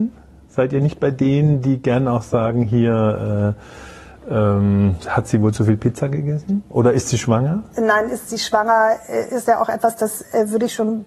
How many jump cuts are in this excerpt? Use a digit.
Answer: 1